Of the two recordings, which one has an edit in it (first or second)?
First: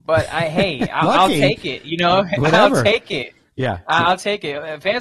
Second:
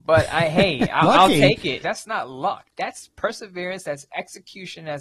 second